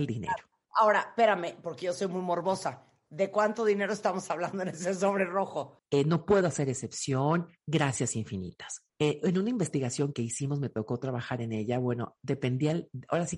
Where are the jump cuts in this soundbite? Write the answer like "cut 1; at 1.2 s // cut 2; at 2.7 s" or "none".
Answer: cut 1; at 5.8 s // cut 2; at 8.9 s // cut 3; at 10.1 s